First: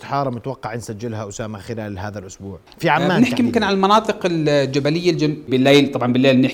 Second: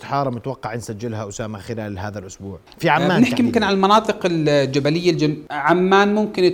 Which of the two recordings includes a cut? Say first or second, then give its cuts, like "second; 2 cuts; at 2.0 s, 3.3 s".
first; 1 cut; at 5.5 s